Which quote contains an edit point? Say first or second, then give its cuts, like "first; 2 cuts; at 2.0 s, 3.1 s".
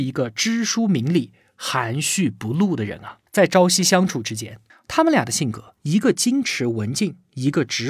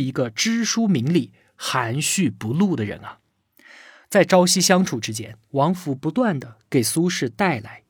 first; 2 cuts; at 3.3 s, 4.7 s